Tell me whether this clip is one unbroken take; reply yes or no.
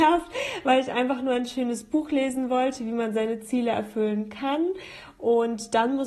yes